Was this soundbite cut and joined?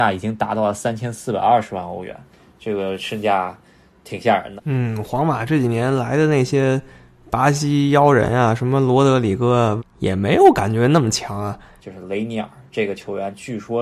yes; 3 cuts; at 4.6 s, 9.8 s, 11.8 s

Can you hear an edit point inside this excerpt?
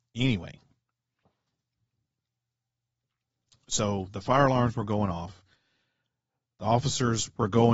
no; 0 cuts

